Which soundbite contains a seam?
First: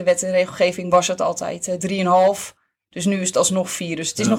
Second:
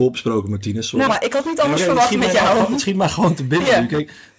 second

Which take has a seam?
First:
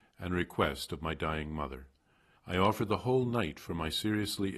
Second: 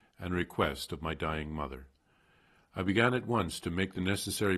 first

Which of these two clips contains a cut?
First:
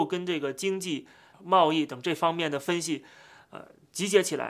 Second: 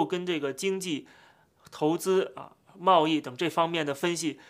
first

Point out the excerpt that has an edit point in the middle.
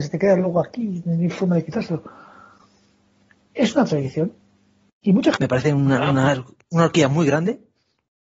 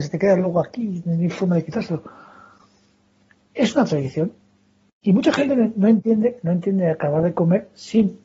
first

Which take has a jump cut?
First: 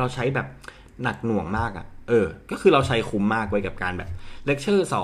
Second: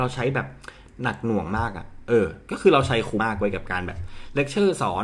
second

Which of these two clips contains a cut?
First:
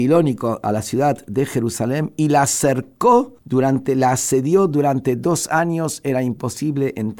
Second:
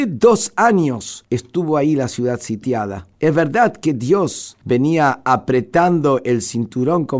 second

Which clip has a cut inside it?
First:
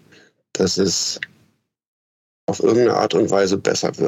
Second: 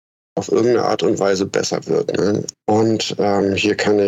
second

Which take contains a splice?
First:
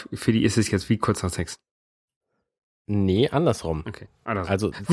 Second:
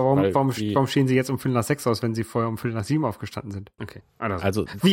second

